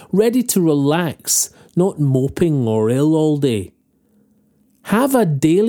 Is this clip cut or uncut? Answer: uncut